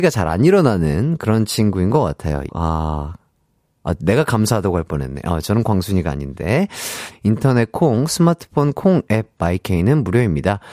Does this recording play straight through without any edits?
no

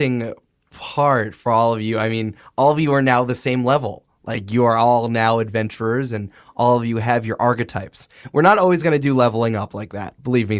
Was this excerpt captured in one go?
yes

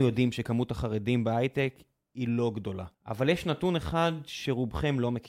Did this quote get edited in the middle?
yes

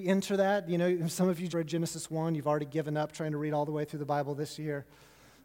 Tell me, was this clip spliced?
yes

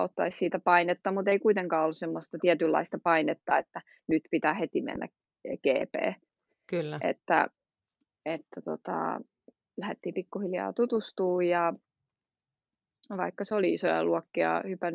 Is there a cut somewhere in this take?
no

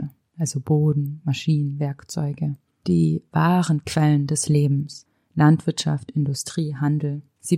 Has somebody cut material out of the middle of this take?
no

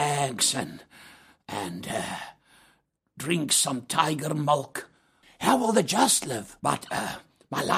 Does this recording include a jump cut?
yes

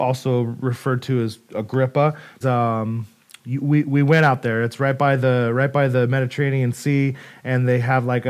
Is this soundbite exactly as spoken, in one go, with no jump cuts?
no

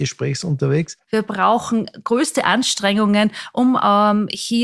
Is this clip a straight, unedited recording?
no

